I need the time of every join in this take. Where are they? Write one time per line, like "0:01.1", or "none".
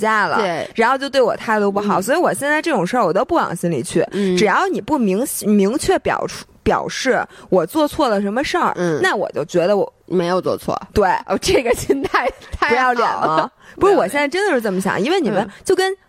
none